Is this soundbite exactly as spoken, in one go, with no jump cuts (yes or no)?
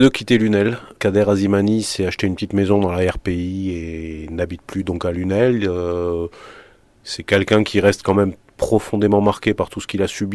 yes